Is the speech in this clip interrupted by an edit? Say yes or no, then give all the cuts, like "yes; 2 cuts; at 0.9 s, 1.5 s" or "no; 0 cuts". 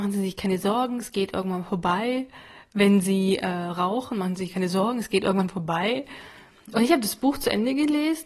no; 0 cuts